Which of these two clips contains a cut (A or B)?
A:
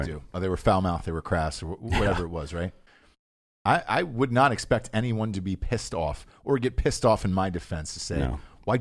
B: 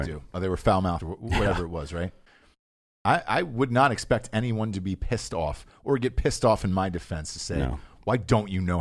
B